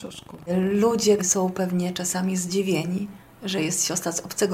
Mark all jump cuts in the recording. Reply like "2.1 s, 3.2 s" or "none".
1.2 s